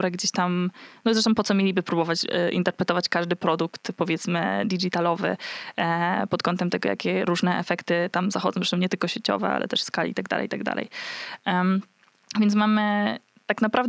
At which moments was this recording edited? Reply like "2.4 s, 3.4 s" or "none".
none